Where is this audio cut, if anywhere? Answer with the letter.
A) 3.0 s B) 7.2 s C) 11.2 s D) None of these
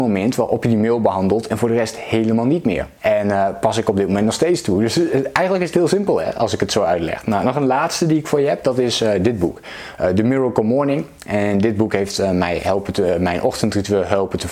A